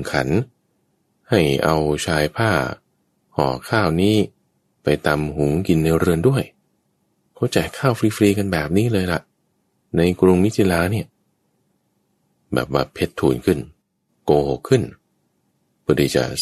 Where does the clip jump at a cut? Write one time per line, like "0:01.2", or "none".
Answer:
none